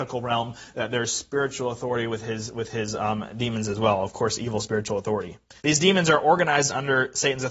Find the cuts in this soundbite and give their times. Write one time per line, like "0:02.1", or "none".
0:05.6